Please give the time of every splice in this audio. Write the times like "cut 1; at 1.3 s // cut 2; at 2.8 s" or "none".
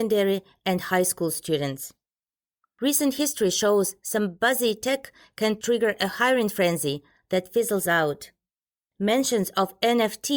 none